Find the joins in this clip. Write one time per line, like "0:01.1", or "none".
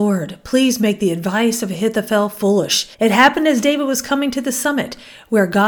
0:02.9